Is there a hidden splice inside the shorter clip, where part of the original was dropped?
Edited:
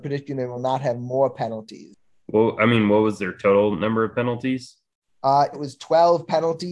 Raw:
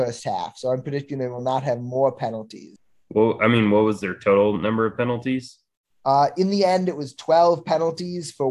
yes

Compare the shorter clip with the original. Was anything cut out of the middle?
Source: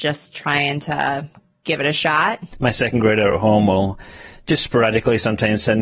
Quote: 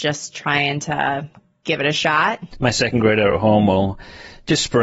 no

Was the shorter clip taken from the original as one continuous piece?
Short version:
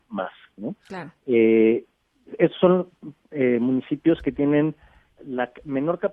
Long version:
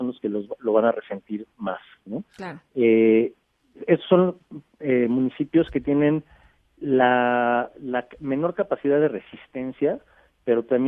no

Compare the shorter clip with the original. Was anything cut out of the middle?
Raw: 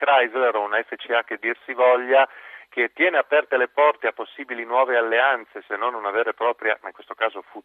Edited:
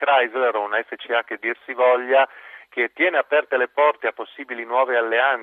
no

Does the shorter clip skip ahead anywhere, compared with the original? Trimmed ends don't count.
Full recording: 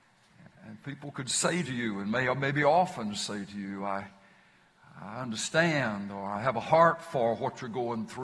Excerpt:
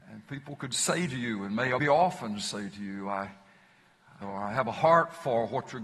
yes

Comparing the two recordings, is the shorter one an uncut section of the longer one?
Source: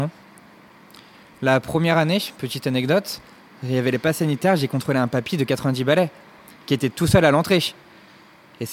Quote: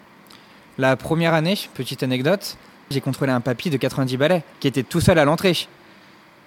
no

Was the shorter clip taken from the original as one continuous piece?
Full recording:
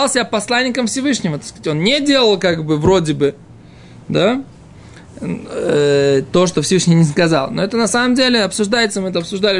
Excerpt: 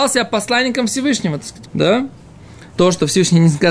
no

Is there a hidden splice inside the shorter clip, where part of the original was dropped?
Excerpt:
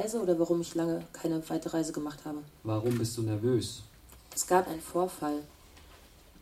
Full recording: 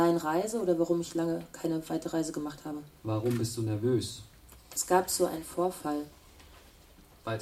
yes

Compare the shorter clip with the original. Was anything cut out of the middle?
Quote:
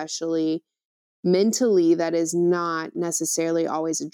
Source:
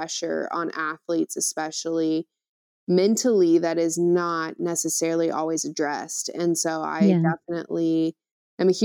no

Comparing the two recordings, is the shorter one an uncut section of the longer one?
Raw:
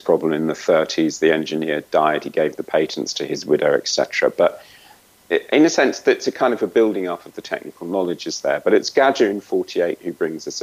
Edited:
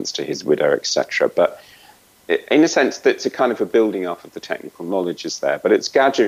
yes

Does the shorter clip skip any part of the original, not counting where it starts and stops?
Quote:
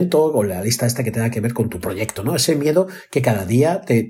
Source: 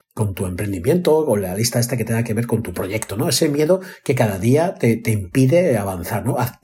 no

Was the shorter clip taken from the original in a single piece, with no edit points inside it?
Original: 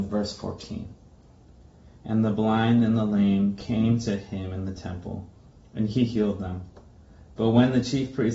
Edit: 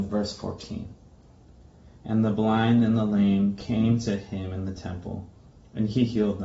yes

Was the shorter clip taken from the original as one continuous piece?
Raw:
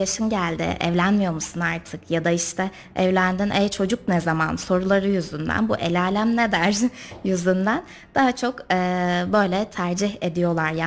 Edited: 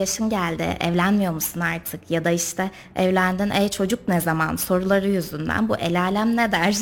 yes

